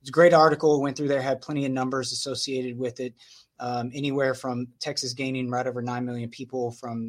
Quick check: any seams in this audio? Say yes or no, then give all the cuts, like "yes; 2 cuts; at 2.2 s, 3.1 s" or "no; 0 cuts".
no; 0 cuts